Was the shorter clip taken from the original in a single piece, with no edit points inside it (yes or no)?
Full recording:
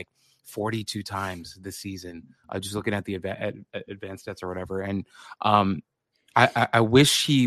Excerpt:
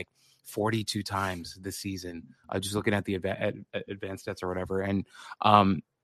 yes